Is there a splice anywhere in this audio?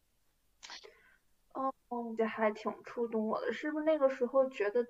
yes; 1 cut; at 2.2 s

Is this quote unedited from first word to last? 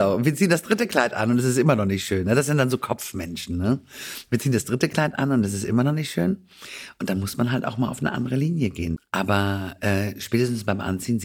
no; 1 cut; at 9.0 s

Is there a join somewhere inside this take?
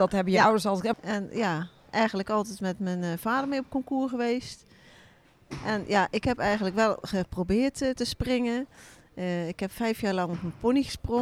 yes; 1 cut; at 0.9 s

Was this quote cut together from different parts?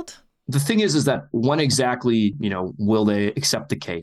no; 0 cuts

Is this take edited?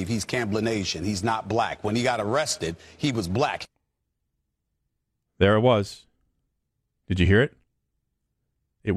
no; 0 cuts

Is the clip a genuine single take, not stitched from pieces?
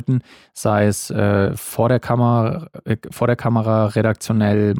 yes; 0 cuts

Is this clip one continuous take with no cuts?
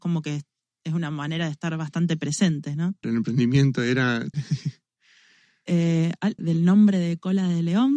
no; 3 cuts; at 3.0 s, 4.3 s, 6.4 s

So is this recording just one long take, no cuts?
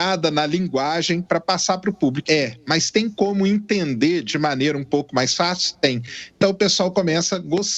no; 1 cut; at 2.2 s

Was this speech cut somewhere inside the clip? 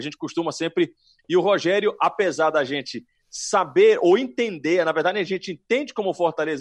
yes; 1 cut; at 1.2 s

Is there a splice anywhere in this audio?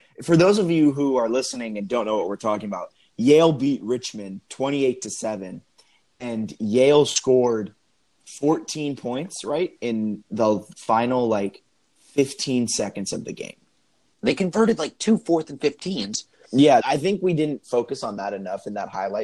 yes; 2 cuts; at 14.1 s, 16.8 s

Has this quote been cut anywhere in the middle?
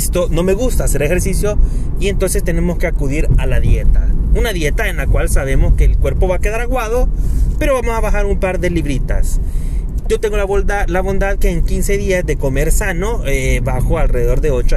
no; 0 cuts

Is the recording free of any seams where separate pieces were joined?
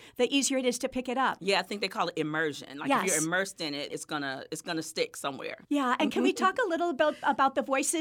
no; 2 cuts; at 3.9 s, 5.6 s

